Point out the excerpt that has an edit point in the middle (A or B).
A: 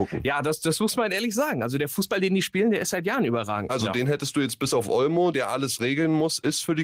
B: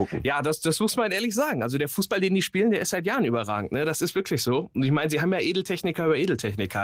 A